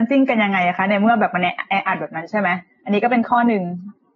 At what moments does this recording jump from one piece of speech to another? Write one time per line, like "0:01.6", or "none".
none